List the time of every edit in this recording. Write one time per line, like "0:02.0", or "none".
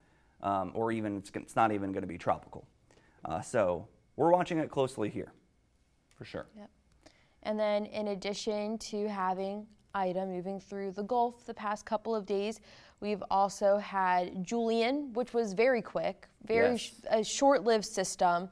none

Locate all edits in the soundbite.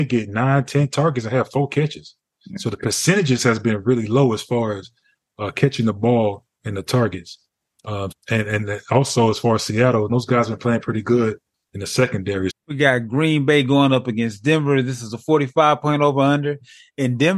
0:08.1
0:10.1
0:12.5

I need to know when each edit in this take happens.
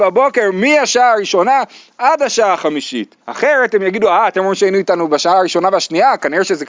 0:03.2

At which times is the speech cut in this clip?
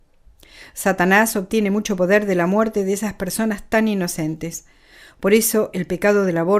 none

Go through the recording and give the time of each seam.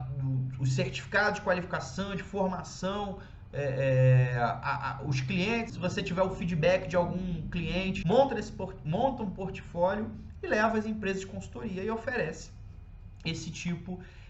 0:05.7
0:08.0

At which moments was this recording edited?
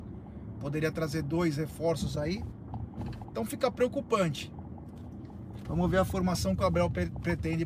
0:05.7

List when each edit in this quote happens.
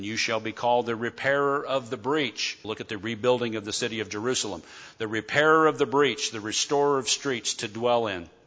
0:02.6

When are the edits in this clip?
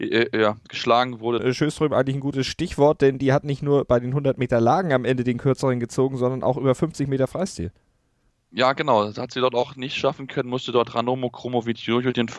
0:01.4

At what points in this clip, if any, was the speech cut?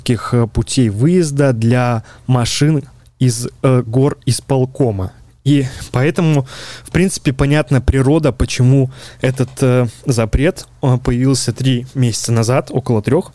none

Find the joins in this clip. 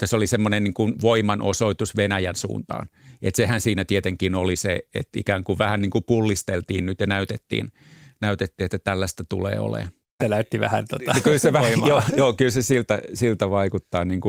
0:10.2

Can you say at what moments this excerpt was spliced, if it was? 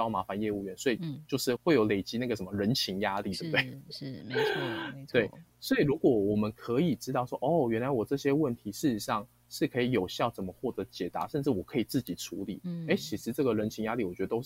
0:01.6

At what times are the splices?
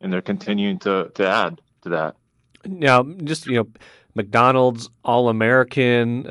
none

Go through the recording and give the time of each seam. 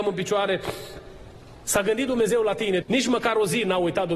0:01.6
0:02.8

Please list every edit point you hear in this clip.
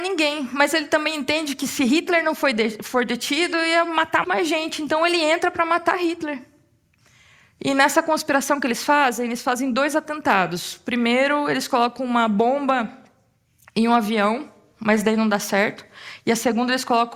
0:04.2

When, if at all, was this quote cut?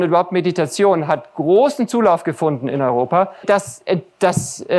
0:03.4

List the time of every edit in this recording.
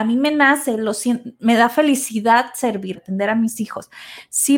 0:02.9

